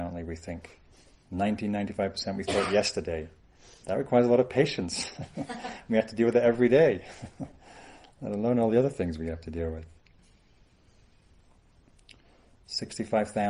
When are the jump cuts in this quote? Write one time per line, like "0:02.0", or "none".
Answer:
0:12.5